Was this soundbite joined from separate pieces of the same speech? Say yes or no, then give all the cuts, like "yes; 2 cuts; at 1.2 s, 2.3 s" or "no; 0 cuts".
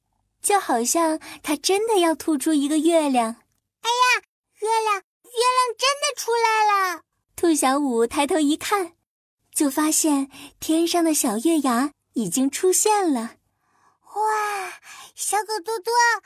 no; 0 cuts